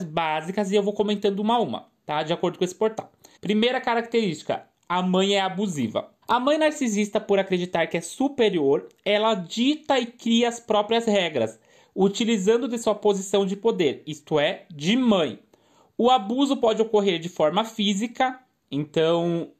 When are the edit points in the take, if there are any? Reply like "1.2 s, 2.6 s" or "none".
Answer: 3.4 s, 6.2 s